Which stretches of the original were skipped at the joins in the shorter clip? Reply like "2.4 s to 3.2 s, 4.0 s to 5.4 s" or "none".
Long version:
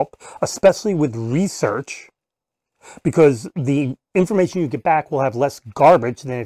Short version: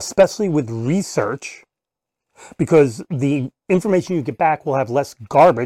none